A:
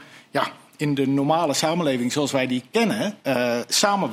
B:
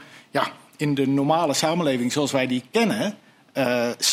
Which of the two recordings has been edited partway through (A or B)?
A